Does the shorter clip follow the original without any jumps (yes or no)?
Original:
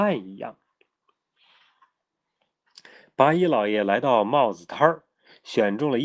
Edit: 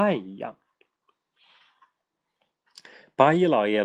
yes